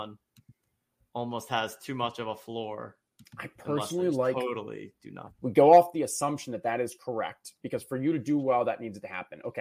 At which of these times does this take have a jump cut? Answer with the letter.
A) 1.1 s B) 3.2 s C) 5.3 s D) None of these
C